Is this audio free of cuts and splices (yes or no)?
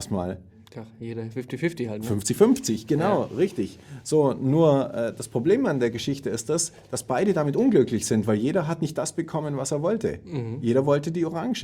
yes